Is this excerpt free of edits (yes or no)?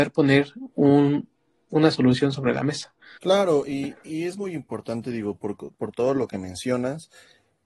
no